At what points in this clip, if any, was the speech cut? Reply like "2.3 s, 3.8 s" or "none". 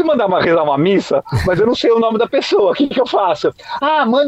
none